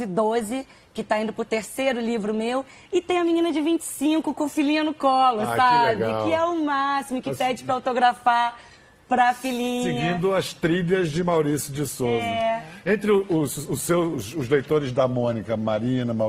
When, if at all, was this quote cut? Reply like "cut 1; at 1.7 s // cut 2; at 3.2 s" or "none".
none